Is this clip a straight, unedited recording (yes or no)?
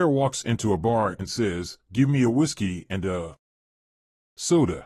yes